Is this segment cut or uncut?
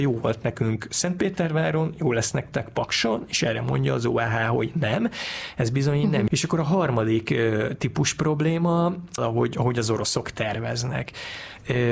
cut